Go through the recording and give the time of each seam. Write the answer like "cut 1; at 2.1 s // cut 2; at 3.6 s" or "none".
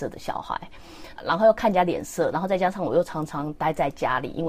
cut 1; at 1.2 s